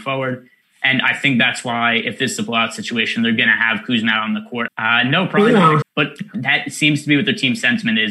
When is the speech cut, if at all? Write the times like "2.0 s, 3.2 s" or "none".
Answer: 4.7 s, 5.8 s

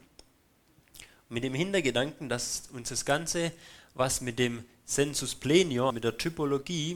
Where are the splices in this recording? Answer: 5.9 s

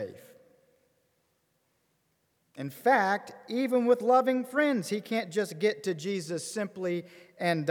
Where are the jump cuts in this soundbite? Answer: 2.4 s

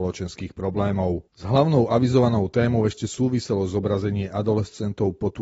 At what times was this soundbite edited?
1.3 s

